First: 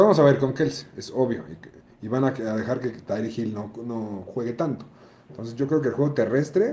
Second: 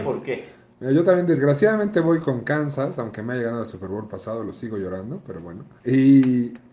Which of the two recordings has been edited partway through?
second; 1 cut; at 5.8 s

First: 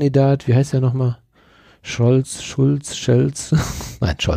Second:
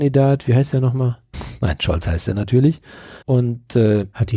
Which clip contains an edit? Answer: second; 2 cuts; at 1.3 s, 3.2 s

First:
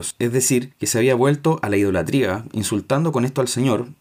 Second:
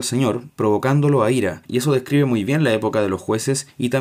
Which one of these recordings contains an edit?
second; 1 cut; at 1.7 s

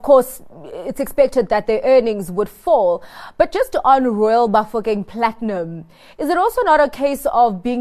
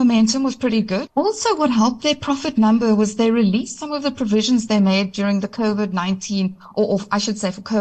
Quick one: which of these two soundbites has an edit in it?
second; 1 cut; at 1.1 s

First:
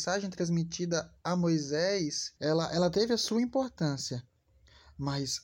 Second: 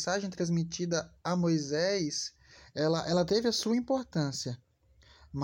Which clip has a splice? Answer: first; 1 cut; at 2.4 s

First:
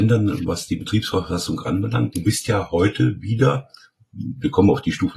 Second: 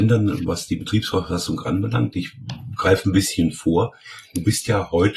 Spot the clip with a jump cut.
first; 1 cut; at 2.1 s

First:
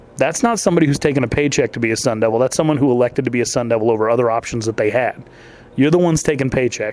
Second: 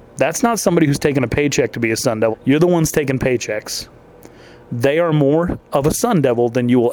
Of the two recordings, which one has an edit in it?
second; 1 cut; at 2.3 s

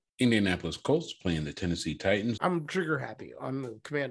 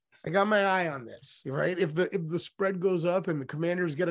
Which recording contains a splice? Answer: first; 1 cut; at 2.4 s

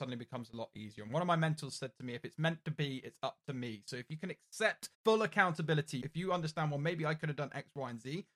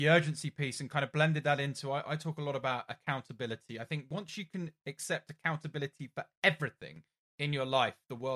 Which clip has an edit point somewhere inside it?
first; 2 cuts; at 4.9 s, 6.0 s

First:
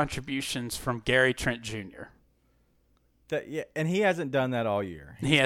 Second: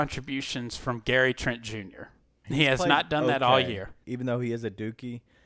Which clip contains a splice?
second; 2 cuts; at 2.4 s, 4.0 s

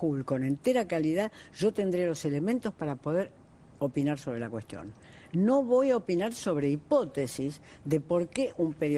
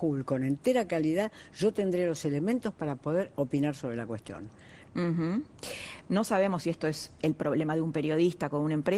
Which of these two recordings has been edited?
second; 3 cuts; at 3.3 s, 4.9 s, 6.0 s

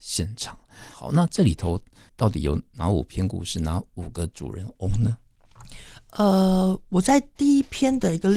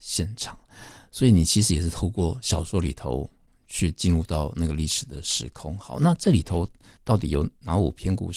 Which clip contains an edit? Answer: first; 1 cut; at 0.9 s

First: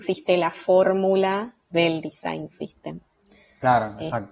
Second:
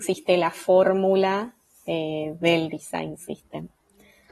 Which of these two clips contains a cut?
first; 1 cut; at 1.7 s

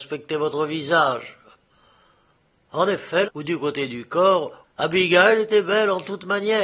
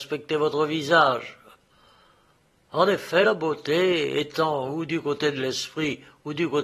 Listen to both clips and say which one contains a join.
first; 2 cuts; at 3.2 s, 4.6 s

